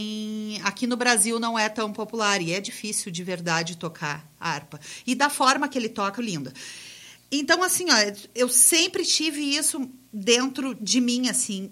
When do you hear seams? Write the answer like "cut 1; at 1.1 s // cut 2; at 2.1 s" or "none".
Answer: cut 1; at 6.2 s